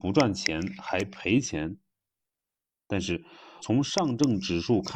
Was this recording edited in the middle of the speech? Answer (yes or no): yes